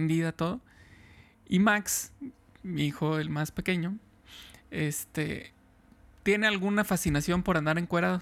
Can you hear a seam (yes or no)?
no